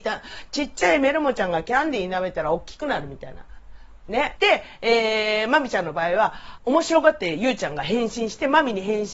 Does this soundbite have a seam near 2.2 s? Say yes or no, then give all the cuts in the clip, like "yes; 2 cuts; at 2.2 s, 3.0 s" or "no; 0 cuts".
no; 2 cuts; at 4.4 s, 6.6 s